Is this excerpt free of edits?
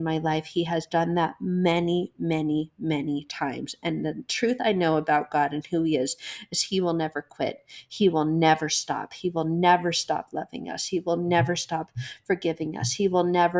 yes; 0 cuts

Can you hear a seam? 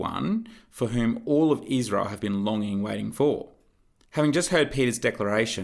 yes; 1 cut; at 4.1 s

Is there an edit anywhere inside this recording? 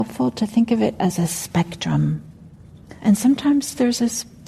yes; 1 cut; at 3.0 s

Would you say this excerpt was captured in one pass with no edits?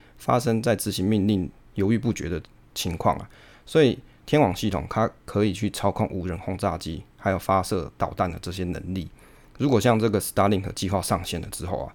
yes; 0 cuts

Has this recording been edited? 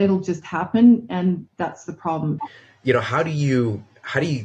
yes; 1 cut; at 2.4 s

